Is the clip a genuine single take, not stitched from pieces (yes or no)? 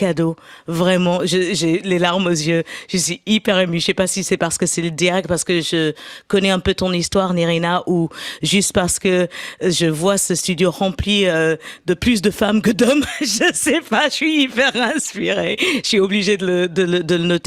yes